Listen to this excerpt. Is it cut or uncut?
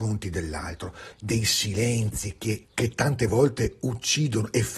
cut